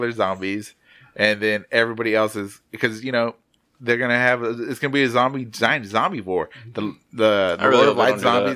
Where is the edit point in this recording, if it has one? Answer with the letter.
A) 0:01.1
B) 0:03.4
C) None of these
C